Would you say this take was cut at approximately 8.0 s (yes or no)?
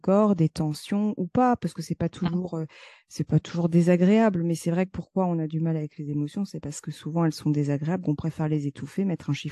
yes